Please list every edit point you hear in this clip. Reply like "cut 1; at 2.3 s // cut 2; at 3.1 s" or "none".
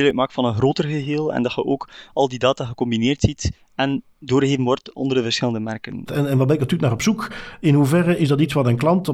cut 1; at 6.1 s